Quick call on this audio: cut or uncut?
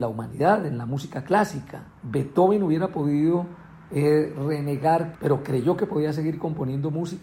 cut